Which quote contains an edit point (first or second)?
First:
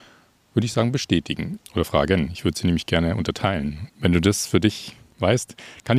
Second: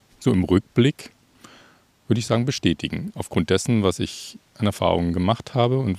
first